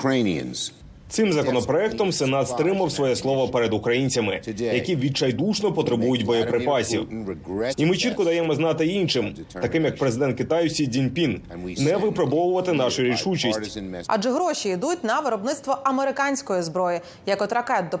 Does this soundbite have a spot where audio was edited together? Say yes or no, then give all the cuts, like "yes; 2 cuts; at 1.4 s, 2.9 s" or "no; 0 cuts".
yes; 2 cuts; at 7.7 s, 14.0 s